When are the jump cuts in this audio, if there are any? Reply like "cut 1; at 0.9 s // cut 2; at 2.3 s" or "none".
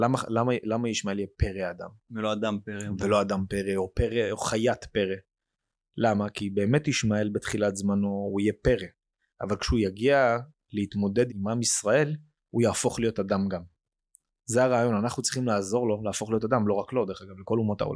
cut 1; at 11.3 s